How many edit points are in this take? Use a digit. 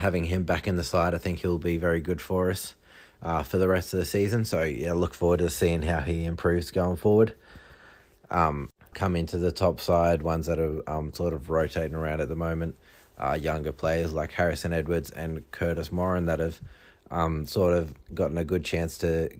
1